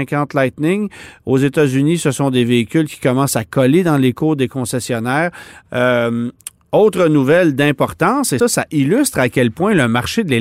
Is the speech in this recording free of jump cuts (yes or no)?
no